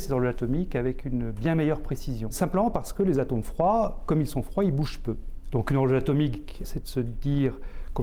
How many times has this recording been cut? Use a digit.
2